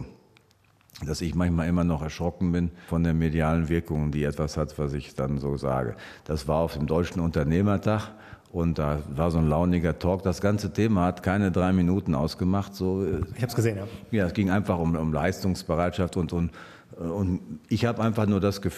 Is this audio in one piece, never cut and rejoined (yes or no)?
yes